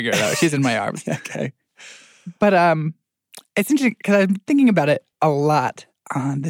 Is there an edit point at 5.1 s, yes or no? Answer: yes